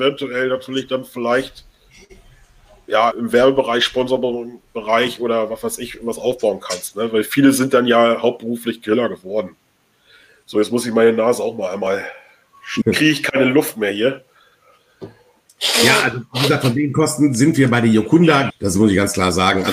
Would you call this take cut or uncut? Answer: cut